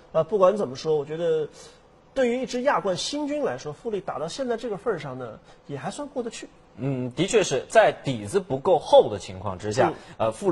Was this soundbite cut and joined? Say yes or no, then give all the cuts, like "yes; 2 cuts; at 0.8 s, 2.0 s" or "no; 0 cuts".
no; 0 cuts